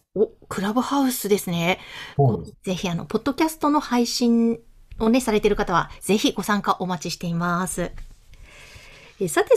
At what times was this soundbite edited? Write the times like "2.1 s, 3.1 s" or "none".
2.5 s, 6.0 s